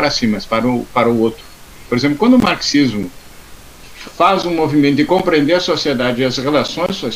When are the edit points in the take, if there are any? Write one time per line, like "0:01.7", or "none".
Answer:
0:01.9
0:04.0

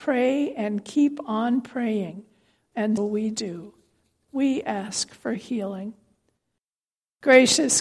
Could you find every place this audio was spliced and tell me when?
0:03.0

